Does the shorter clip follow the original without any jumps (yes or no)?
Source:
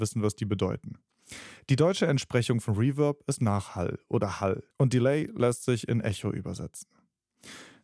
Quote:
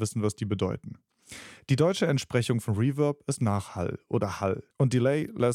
yes